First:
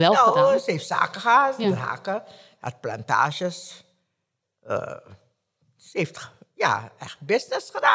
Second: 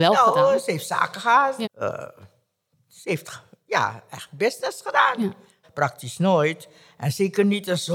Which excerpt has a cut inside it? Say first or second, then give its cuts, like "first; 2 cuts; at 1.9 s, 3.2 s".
second; 2 cuts; at 1.6 s, 5.6 s